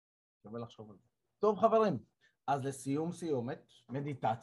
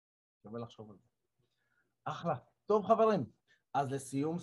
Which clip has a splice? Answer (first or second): first